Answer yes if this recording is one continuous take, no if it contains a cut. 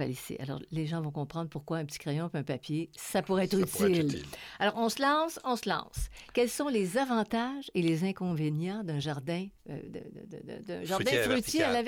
yes